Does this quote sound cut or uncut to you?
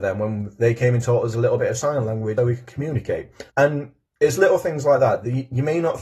cut